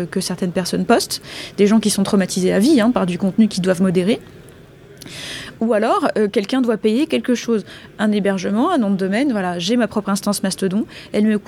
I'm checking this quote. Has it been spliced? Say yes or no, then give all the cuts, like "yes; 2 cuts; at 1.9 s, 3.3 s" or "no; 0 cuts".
no; 0 cuts